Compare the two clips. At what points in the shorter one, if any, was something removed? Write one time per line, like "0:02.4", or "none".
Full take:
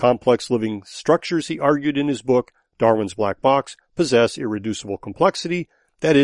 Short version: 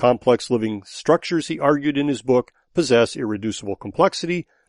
0:02.6